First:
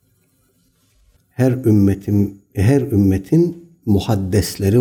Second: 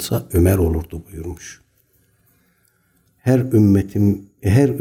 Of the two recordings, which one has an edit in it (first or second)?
first